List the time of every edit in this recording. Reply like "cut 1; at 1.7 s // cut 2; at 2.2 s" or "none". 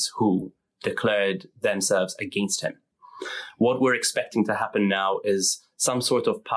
none